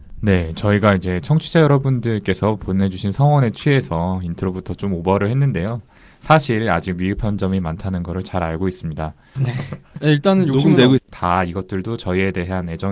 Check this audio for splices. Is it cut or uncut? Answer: cut